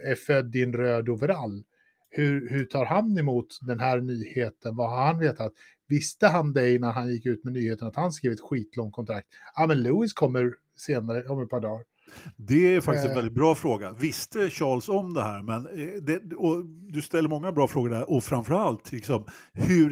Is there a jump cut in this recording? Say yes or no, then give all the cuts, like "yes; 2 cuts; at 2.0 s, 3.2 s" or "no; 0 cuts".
no; 0 cuts